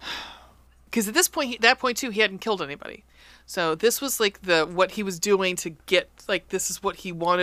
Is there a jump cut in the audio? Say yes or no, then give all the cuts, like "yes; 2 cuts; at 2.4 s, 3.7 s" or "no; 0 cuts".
no; 0 cuts